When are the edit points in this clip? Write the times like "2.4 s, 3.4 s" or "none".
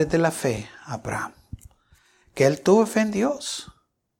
none